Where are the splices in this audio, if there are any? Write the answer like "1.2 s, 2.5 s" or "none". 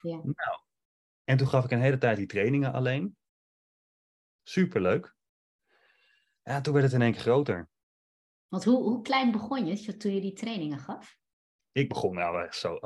none